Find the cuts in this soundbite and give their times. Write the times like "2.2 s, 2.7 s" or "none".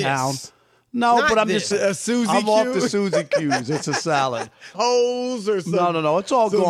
1.7 s, 4.7 s